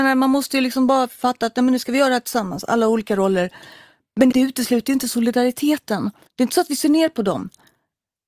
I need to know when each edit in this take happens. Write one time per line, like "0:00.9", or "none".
0:04.3
0:06.3